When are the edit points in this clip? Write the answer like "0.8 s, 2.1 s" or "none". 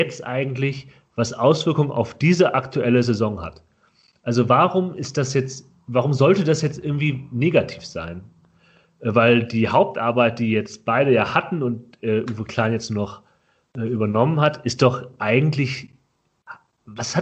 none